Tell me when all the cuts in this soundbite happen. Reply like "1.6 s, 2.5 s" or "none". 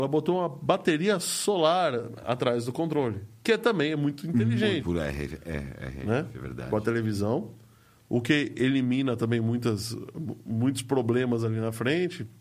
4.8 s